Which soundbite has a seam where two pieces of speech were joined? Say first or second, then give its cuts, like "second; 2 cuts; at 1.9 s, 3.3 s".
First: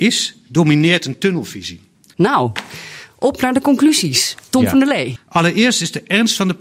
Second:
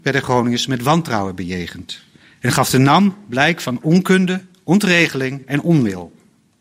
first; 2 cuts; at 2.1 s, 5.2 s